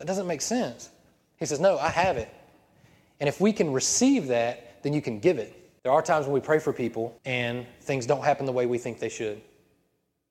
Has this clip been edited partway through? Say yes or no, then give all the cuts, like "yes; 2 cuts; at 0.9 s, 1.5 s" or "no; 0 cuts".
yes; 2 cuts; at 5.8 s, 7.2 s